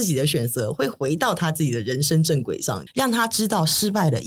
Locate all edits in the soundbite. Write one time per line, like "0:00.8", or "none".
0:02.9

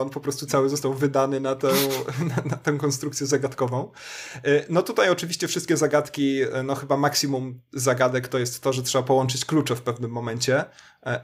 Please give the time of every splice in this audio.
none

